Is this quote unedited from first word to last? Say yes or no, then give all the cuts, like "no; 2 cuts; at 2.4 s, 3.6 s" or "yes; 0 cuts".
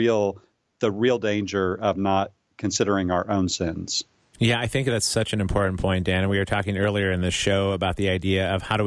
yes; 0 cuts